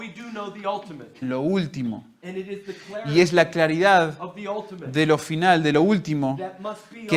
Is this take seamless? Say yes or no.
no